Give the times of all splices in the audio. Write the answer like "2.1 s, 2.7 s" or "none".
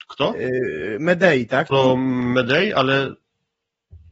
1.7 s